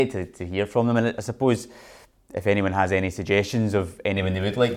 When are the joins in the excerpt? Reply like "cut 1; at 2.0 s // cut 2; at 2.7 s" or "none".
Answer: none